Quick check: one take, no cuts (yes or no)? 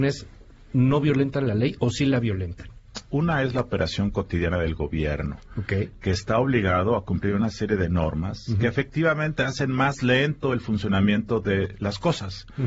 no